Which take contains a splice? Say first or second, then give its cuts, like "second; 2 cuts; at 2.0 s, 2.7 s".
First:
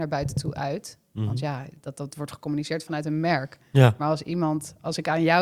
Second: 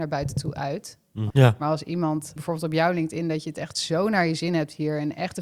second; 2 cuts; at 1.3 s, 2.4 s